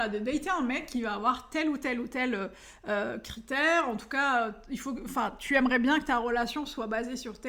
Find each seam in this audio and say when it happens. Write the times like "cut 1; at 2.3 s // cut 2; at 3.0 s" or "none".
none